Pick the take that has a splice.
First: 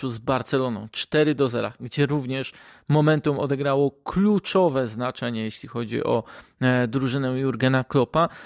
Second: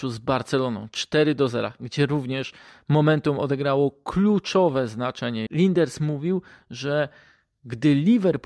second; 1 cut; at 5.5 s

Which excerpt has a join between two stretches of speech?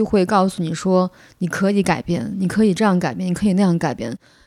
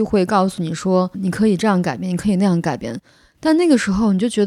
second; 1 cut; at 1.1 s

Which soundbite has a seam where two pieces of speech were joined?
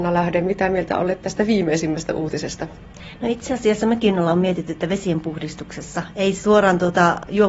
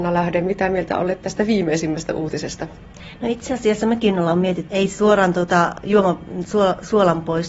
second; 1 cut; at 4.7 s

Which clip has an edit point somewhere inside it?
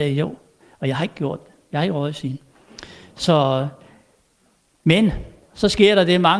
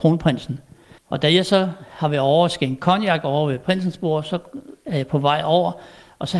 second; 1 cut; at 1.0 s

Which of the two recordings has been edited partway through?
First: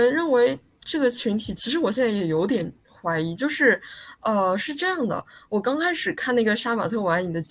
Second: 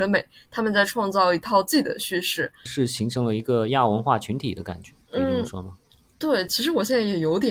second; 3 cuts; at 2.7 s, 5.0 s, 6.5 s

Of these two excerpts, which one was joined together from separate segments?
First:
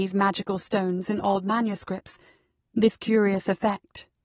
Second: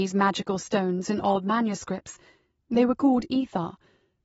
first; 1 cut; at 2.6 s

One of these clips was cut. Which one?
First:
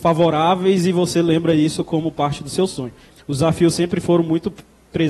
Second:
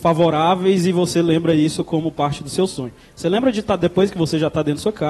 first; 1 cut; at 3.1 s

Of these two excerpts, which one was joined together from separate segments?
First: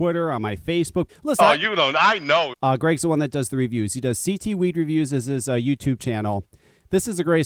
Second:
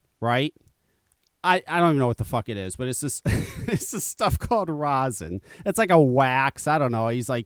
first; 2 cuts; at 1.1 s, 2.5 s

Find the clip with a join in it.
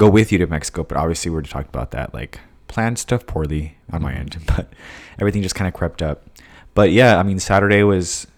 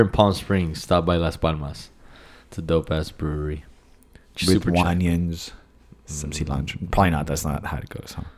second; 1 cut; at 4.8 s

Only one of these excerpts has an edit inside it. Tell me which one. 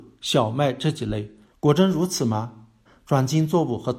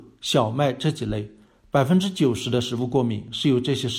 first; 2 cuts; at 1.5 s, 2.9 s

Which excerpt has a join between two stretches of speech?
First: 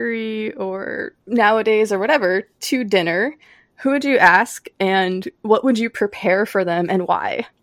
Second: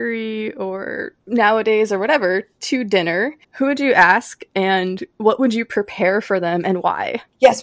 second; 1 cut; at 3.4 s

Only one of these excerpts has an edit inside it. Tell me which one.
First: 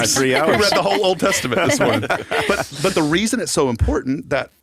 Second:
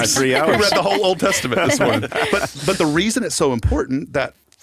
second; 1 cut; at 2.1 s

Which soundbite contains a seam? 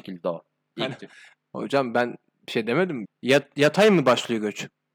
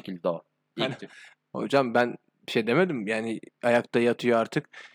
first; 1 cut; at 3.0 s

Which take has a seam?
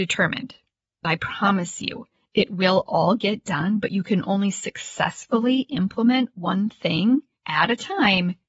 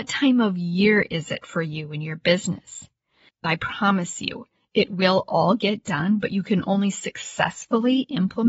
second; 1 cut; at 3.3 s

